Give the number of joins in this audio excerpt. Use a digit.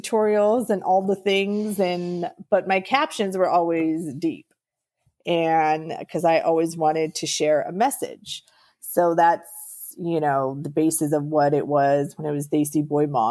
0